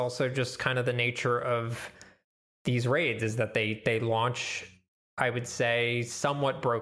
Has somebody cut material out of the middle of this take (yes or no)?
no